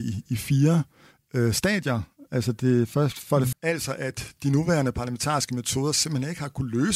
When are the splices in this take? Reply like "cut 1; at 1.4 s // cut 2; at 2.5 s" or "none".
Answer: cut 1; at 3.5 s